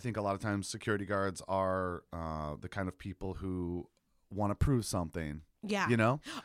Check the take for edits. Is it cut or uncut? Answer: uncut